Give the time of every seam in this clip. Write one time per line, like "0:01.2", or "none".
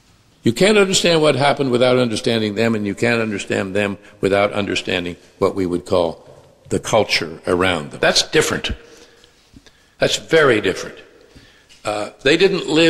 0:08.0